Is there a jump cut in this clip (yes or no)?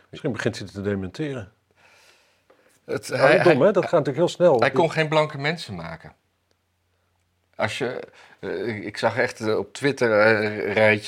no